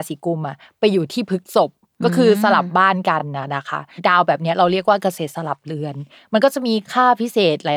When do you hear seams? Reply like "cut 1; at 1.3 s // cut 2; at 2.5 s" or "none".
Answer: none